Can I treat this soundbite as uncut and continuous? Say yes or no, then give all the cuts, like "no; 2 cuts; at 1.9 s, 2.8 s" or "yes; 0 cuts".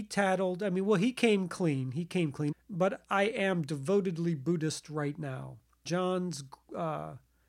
no; 2 cuts; at 2.5 s, 5.9 s